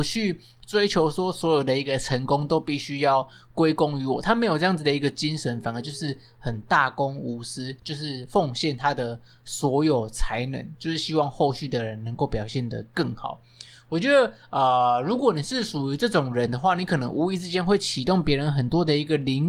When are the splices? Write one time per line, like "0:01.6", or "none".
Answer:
none